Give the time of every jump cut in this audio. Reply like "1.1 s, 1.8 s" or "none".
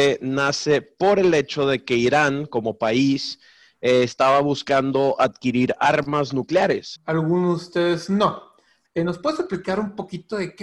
7.0 s, 8.9 s